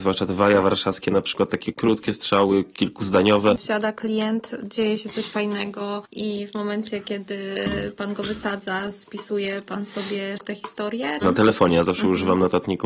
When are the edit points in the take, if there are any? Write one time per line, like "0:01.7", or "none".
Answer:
0:03.6
0:11.2

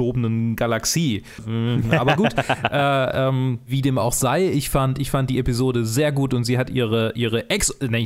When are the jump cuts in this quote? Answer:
0:01.4

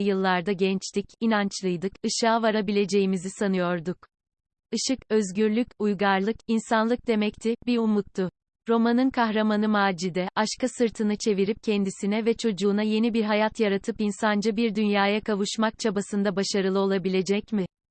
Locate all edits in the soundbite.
0:08.5

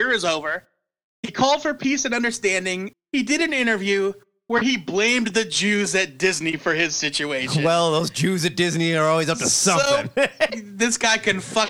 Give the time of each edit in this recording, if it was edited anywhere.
0:02.9
0:10.5

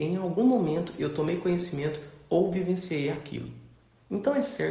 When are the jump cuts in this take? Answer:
none

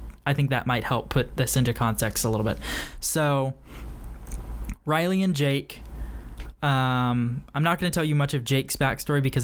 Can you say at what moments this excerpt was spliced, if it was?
none

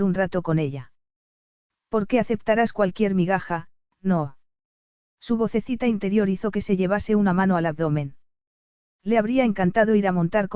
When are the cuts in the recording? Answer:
0:08.8

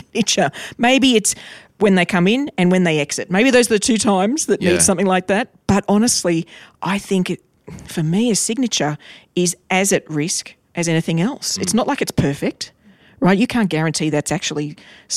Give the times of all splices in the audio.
none

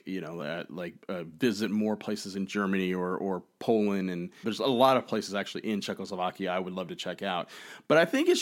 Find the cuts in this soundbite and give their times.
0:04.4

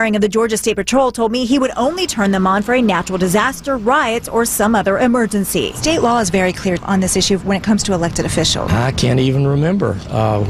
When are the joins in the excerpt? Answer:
0:06.8
0:08.7

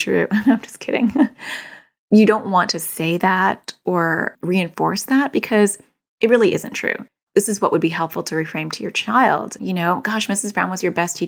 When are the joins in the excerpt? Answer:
0:09.6

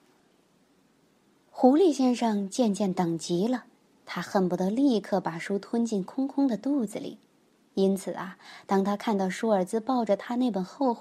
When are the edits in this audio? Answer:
none

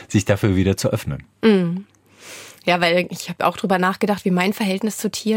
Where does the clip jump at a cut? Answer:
none

